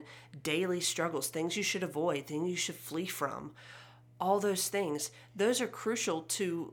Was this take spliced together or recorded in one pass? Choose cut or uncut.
uncut